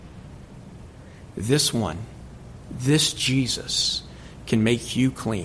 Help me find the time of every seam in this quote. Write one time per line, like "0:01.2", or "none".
none